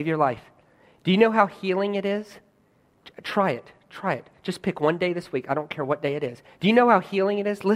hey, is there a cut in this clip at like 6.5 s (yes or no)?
yes